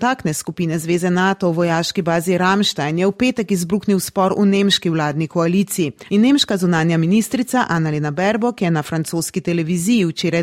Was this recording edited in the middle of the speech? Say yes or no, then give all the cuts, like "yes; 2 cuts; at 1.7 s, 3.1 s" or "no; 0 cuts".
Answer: yes; 1 cut; at 6.1 s